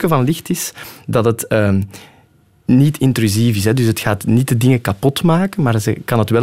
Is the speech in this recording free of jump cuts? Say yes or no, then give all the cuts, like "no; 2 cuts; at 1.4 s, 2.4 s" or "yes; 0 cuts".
yes; 0 cuts